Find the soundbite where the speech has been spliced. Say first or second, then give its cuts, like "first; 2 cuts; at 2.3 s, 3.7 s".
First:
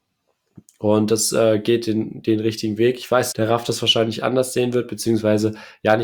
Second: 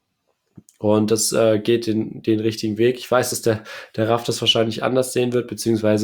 first; 1 cut; at 3.3 s